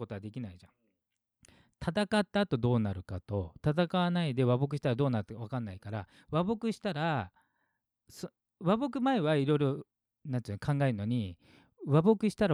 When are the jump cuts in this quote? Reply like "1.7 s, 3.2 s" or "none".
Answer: none